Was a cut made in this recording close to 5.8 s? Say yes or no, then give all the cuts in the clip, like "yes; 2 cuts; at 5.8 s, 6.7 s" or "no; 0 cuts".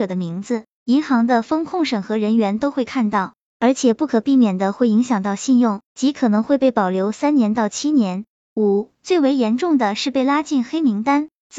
yes; 2 cuts; at 5.8 s, 8.4 s